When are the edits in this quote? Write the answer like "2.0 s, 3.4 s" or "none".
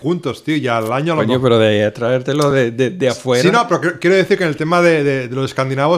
none